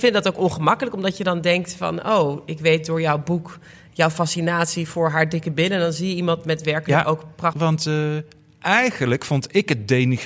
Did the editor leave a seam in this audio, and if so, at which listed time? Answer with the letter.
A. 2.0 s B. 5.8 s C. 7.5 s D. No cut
C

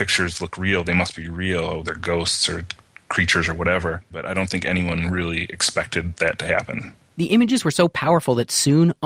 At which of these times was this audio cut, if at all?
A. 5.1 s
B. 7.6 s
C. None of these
C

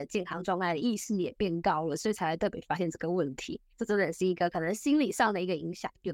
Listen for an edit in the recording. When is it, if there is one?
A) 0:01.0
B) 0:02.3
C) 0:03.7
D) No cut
C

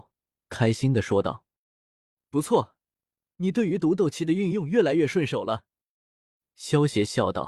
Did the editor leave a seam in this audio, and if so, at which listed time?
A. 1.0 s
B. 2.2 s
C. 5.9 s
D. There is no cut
D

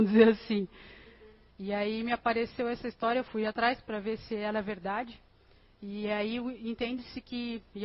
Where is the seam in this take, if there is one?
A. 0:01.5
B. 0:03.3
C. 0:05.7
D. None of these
A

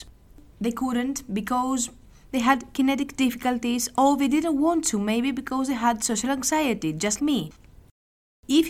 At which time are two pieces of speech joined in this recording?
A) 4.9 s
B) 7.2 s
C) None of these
B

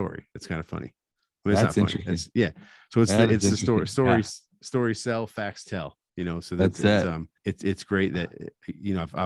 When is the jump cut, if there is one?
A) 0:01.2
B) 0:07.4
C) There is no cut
B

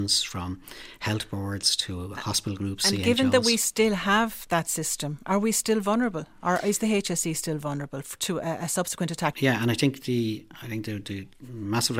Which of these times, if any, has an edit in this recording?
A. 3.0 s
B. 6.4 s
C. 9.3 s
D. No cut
C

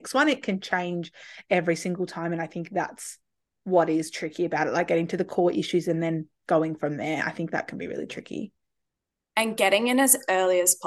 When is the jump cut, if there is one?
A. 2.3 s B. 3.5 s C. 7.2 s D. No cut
D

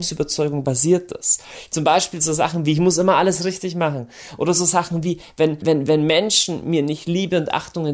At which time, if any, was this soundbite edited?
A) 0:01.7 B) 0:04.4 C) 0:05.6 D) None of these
C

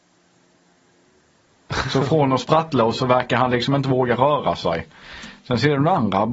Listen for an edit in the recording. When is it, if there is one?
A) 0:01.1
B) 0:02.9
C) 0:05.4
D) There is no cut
B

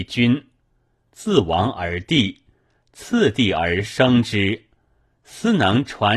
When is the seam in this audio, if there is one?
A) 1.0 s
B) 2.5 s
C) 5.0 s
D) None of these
A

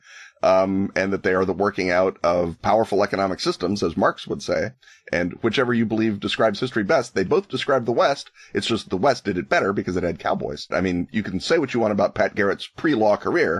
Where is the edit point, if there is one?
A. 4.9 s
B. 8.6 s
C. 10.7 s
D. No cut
C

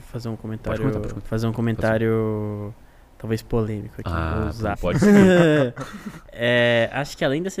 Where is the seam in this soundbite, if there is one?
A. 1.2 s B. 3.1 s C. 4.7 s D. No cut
C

